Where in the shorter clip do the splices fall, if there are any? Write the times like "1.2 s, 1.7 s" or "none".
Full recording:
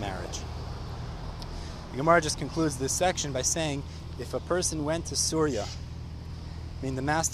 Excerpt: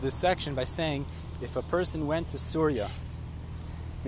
none